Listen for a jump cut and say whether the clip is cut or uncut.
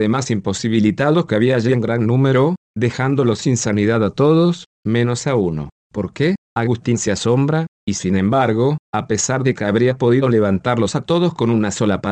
cut